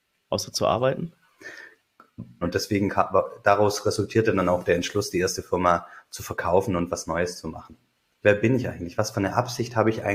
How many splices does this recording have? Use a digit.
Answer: 2